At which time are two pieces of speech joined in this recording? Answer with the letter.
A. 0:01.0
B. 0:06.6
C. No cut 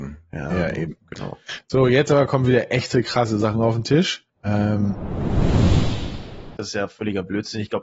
B